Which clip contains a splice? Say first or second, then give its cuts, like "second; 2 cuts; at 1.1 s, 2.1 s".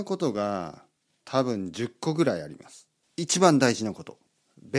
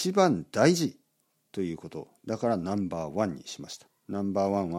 first; 1 cut; at 3.0 s